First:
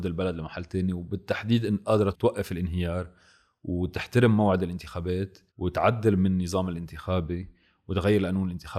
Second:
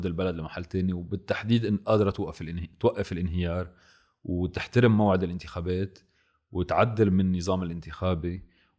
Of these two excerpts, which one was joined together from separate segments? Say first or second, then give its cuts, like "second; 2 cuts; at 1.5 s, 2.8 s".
first; 2 cuts; at 2.1 s, 5.5 s